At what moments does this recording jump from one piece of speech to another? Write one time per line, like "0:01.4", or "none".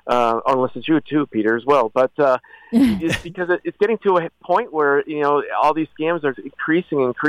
0:06.3